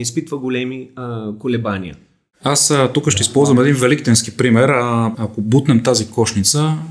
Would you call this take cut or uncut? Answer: cut